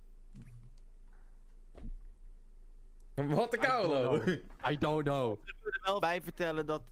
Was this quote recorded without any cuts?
no; 1 cut; at 6.0 s

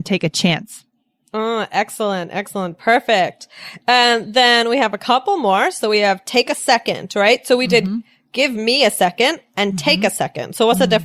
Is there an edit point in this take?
no; 0 cuts

